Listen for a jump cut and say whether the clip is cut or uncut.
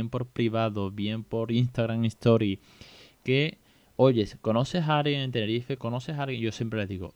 cut